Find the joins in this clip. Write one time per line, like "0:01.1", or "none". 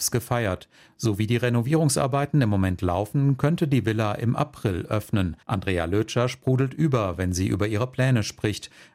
0:05.4